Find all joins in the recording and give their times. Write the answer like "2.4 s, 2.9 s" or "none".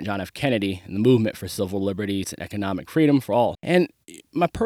2.2 s, 3.5 s